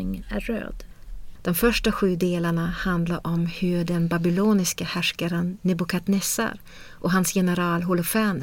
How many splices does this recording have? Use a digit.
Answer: 1